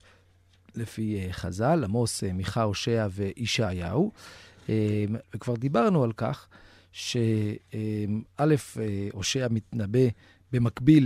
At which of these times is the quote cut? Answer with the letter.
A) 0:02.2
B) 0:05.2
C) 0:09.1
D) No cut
B